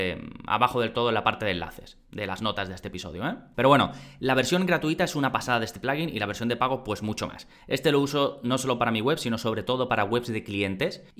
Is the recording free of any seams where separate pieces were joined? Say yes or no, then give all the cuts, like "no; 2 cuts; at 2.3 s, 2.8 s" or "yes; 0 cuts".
yes; 0 cuts